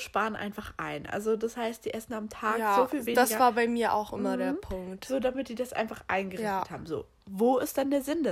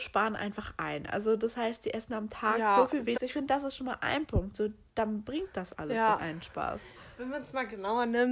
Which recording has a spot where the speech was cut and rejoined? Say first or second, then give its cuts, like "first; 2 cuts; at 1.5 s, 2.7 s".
second; 2 cuts; at 3.1 s, 6.2 s